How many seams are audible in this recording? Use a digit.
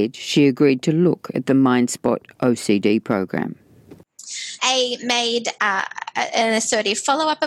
1